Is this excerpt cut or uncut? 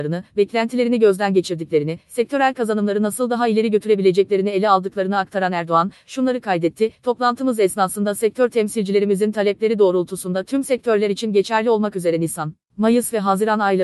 uncut